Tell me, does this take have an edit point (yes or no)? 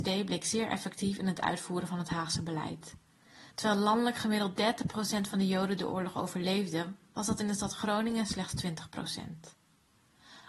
yes